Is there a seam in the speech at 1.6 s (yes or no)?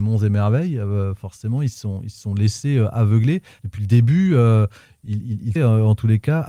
no